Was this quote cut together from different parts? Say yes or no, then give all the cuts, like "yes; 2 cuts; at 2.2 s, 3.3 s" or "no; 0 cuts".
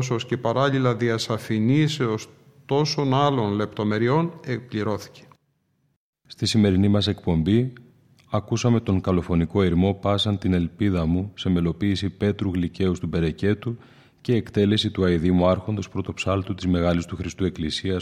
no; 0 cuts